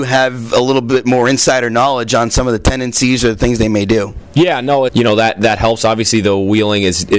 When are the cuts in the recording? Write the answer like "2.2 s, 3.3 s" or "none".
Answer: 4.9 s